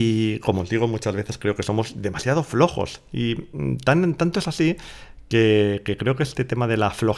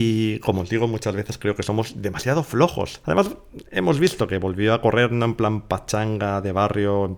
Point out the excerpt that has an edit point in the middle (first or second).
second